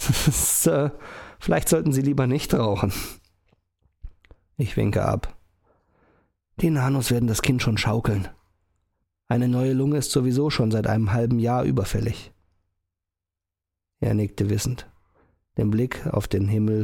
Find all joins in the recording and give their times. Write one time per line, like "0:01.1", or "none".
none

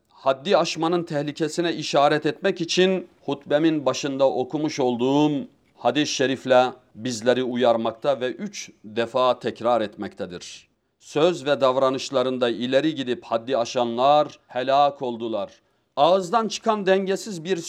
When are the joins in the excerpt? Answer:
none

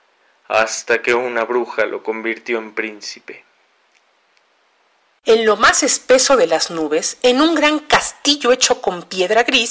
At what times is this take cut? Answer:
0:05.2

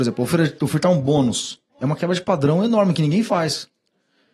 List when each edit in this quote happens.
0:01.7

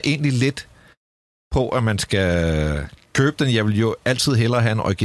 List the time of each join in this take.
none

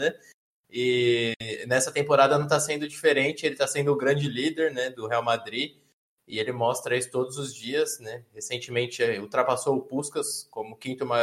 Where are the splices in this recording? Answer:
none

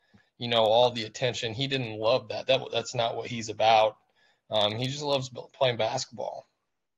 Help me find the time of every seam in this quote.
none

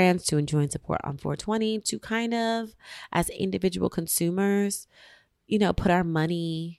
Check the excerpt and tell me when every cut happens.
none

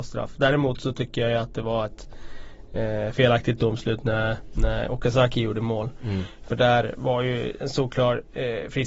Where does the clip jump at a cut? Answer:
none

